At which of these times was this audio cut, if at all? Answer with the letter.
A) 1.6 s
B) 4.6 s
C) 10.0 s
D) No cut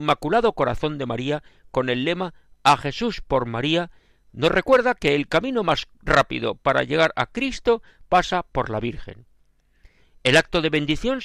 C